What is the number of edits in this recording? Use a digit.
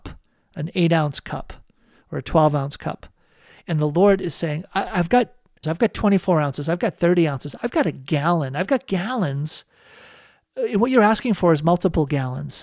1